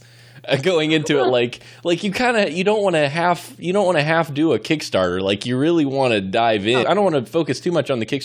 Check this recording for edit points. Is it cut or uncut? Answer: cut